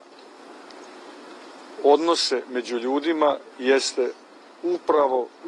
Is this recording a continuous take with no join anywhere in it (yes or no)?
yes